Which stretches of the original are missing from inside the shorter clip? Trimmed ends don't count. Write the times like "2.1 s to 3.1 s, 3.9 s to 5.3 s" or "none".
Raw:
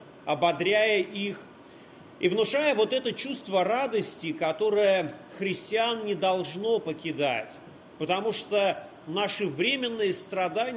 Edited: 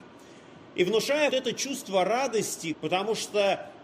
2.7 s to 2.9 s, 4.3 s to 7.9 s